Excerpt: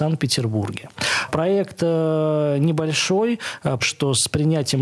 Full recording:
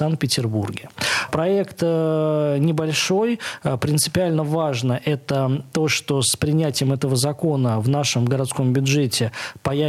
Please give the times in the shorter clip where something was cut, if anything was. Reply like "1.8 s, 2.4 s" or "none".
3.8 s